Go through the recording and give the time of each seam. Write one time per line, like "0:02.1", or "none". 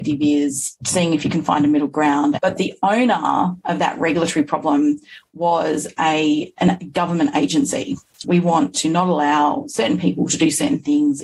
0:02.4
0:08.2